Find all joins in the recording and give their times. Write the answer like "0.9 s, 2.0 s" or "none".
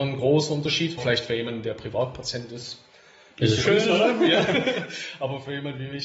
1.0 s, 3.6 s